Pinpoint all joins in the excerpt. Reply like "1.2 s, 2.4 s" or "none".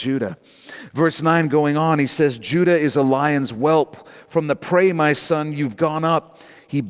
none